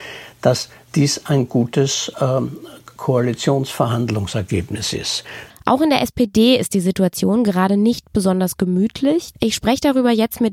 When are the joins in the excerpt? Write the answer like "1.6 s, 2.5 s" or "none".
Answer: 5.5 s, 9.3 s